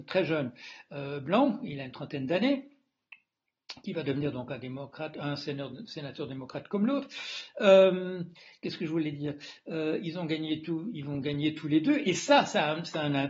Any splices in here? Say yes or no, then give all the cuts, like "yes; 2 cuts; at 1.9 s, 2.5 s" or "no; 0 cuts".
no; 0 cuts